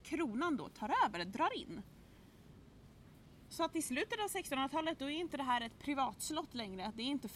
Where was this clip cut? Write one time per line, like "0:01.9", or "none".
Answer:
none